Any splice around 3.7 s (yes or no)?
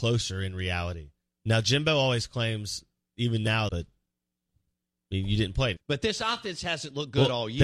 yes